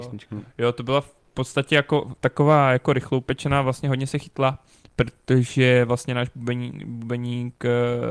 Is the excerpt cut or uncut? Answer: uncut